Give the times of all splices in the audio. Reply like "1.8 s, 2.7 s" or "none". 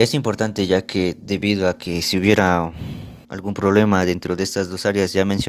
3.2 s